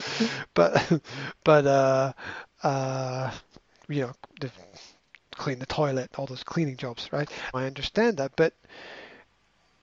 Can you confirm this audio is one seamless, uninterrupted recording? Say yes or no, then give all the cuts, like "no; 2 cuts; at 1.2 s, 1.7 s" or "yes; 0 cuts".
no; 1 cut; at 7.5 s